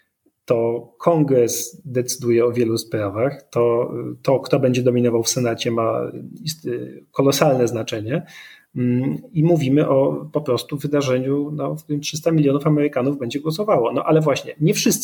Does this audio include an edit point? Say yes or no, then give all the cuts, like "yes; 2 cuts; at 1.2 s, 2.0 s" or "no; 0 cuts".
no; 0 cuts